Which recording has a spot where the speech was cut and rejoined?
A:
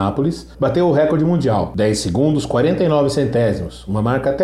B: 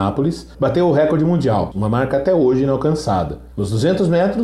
B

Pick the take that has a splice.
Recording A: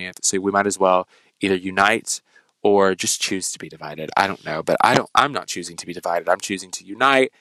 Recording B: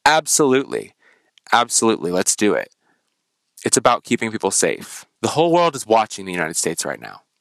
B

